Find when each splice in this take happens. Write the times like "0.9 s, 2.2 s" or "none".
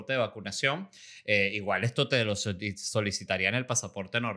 none